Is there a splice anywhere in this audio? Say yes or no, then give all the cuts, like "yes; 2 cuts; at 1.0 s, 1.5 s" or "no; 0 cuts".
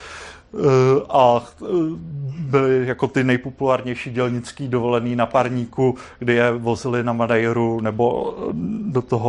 no; 0 cuts